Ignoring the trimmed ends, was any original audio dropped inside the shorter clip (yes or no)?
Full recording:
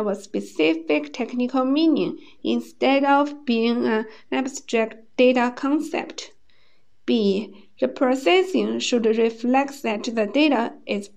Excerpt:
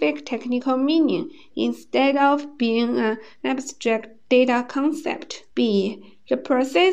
yes